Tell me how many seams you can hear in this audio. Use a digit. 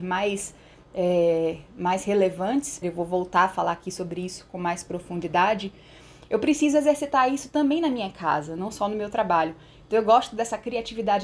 1